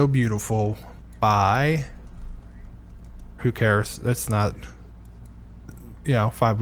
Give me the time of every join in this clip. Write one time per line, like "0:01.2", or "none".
0:03.4